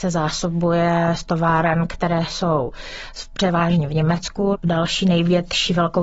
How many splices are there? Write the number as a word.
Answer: zero